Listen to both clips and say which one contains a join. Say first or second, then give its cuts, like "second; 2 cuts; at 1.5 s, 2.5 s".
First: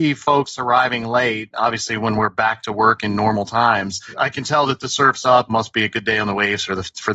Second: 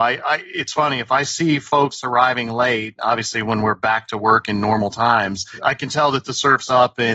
first; 1 cut; at 5.5 s